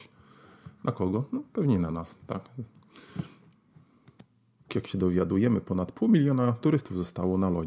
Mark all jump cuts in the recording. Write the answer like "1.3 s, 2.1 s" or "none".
2.2 s, 4.7 s